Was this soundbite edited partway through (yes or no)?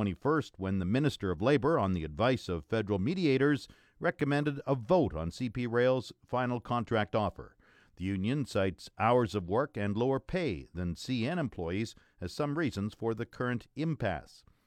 no